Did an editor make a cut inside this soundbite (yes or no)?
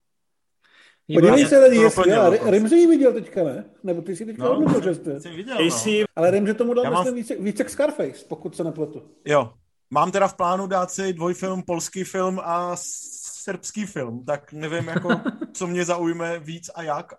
yes